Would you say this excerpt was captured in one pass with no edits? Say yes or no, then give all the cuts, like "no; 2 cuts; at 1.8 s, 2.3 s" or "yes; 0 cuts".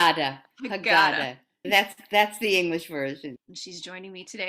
no; 2 cuts; at 1.6 s, 3.4 s